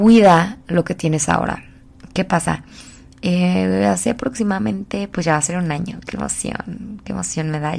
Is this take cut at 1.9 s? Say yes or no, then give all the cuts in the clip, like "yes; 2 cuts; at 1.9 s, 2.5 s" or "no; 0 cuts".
no; 0 cuts